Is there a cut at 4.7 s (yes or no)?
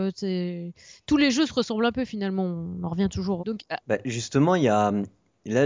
no